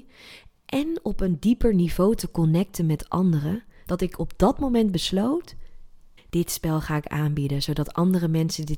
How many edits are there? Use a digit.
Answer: 1